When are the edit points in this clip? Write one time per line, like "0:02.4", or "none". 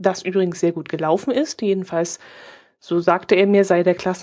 none